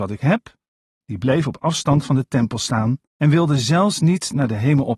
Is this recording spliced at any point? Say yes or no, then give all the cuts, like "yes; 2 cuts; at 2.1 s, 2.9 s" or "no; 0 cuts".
yes; 2 cuts; at 1.0 s, 3.1 s